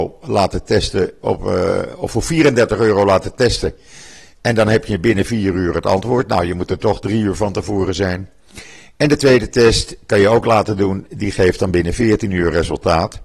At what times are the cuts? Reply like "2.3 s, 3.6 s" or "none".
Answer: none